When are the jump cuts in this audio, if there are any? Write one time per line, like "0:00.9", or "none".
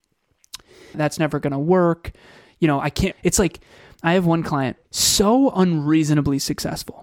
0:00.9
0:03.1
0:04.8